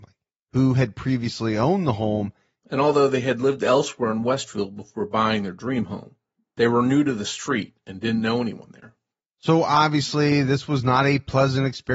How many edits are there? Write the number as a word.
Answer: one